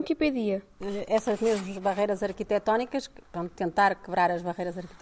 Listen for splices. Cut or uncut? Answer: uncut